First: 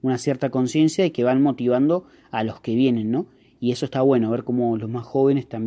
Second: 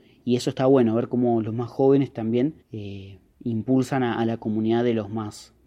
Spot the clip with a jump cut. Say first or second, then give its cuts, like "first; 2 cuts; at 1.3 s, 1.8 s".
second; 1 cut; at 2.6 s